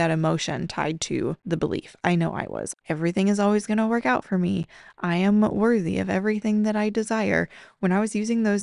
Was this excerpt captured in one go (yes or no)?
no